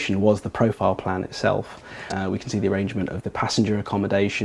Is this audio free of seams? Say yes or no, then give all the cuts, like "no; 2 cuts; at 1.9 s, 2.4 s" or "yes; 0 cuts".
no; 1 cut; at 2.1 s